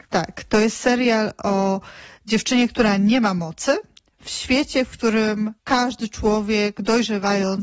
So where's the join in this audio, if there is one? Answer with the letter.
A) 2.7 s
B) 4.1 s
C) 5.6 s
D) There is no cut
C